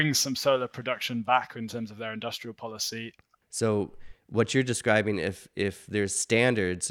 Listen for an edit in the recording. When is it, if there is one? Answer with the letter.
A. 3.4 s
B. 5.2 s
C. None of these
A